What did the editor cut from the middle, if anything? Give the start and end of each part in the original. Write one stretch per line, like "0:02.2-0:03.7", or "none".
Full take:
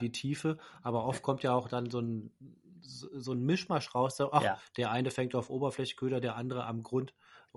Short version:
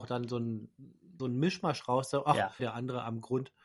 0:02.8-0:03.3
0:04.7-0:06.2